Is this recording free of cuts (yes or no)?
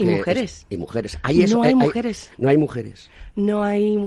yes